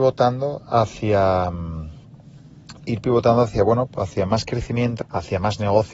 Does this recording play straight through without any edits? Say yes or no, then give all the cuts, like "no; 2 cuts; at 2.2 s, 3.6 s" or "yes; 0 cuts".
no; 1 cut; at 5.0 s